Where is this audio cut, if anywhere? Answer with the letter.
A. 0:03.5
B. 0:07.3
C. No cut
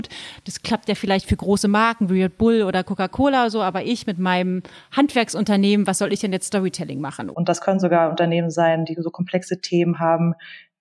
B